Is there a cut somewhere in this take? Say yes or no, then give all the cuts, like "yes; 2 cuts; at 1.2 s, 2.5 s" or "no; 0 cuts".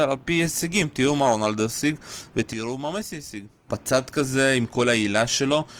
yes; 1 cut; at 3.7 s